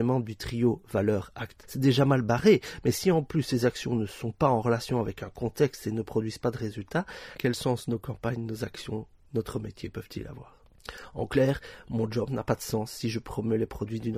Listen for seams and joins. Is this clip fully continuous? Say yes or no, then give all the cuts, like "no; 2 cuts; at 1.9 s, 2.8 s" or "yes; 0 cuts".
no; 1 cut; at 1.6 s